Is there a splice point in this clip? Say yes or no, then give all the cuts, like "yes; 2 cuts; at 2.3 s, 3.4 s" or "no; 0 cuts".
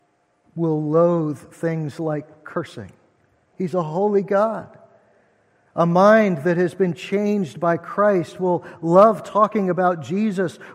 yes; 1 cut; at 3.5 s